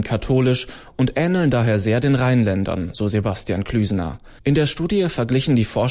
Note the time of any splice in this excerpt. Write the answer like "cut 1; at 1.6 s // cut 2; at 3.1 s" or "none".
cut 1; at 4.4 s